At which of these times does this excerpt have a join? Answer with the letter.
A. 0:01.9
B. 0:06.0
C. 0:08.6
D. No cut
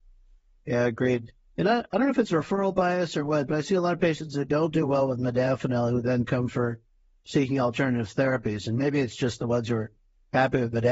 D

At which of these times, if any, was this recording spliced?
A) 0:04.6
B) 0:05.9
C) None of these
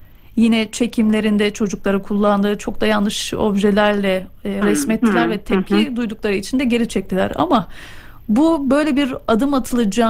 A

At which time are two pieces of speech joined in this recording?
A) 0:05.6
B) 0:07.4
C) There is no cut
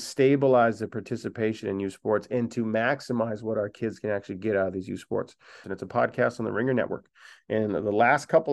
A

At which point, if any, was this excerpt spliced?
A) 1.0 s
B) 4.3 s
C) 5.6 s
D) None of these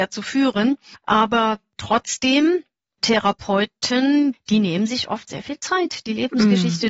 B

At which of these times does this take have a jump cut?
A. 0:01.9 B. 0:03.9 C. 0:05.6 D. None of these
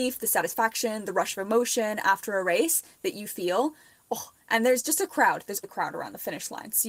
C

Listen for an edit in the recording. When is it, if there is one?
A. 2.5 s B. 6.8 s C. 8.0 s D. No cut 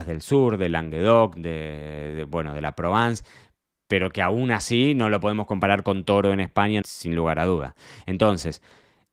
B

